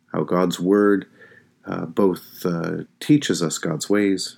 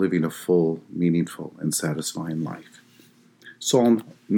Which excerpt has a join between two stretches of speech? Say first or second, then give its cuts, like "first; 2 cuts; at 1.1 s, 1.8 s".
first; 1 cut; at 2.9 s